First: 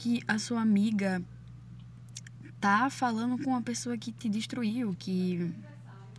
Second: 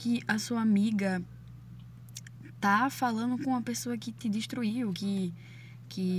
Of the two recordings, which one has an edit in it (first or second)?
first